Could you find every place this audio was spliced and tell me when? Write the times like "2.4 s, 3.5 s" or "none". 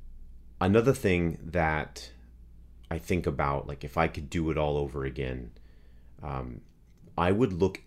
none